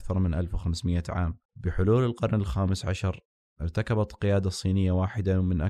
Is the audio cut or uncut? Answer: cut